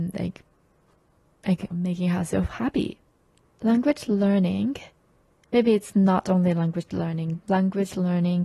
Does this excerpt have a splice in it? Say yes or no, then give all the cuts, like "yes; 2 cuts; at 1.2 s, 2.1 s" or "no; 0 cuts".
yes; 2 cuts; at 1.7 s, 7.4 s